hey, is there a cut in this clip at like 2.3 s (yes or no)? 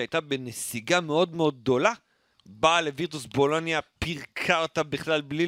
yes